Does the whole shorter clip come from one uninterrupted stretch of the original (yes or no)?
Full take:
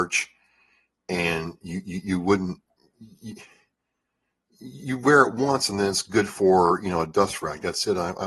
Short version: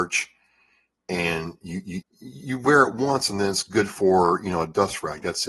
no